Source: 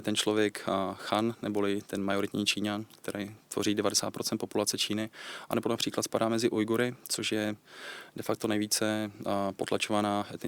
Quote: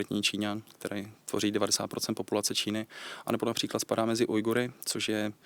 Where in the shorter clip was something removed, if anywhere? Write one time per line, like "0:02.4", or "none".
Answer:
none